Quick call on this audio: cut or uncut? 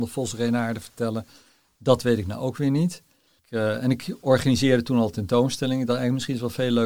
uncut